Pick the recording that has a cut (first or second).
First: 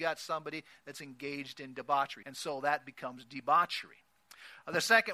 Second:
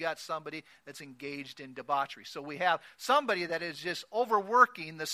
first